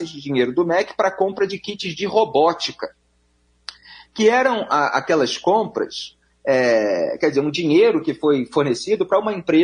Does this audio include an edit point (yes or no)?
no